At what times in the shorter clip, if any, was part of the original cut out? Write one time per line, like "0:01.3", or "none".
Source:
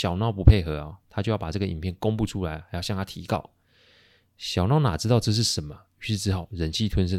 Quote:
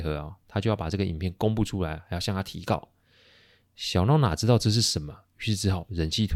none